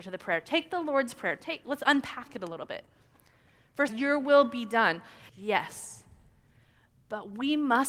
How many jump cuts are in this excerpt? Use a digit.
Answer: 2